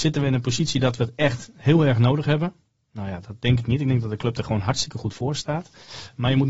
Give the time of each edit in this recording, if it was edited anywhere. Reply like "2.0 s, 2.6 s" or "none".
none